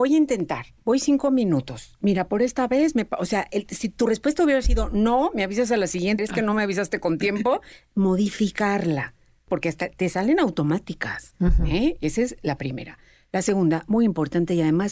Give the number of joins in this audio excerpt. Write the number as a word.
one